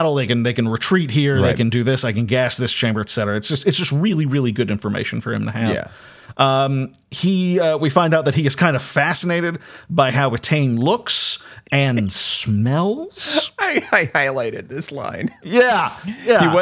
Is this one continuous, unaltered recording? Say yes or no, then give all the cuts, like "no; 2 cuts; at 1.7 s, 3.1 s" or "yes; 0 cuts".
yes; 0 cuts